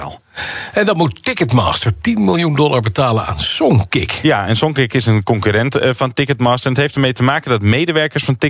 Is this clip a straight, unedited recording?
yes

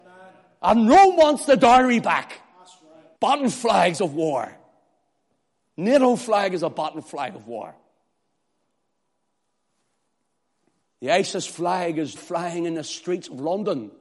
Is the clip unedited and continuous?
no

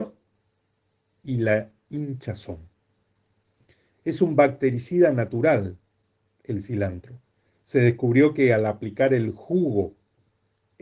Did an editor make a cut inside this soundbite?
no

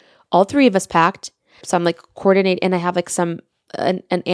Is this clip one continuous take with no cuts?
no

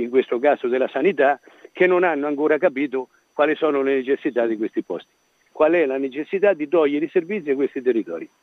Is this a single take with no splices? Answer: no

